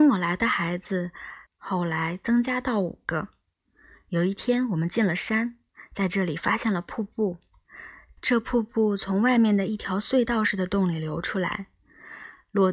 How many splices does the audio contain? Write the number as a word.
one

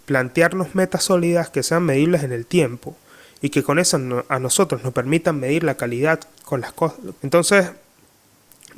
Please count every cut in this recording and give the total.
one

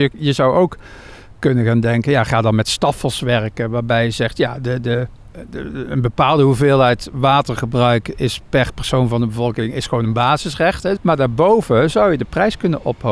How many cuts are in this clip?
one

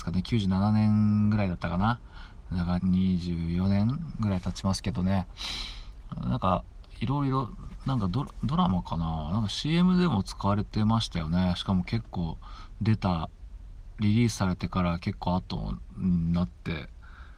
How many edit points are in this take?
one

